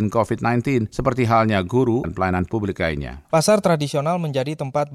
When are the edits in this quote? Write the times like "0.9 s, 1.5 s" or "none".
2.0 s, 3.3 s